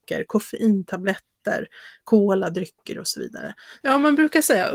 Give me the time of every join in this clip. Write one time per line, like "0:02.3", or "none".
0:03.8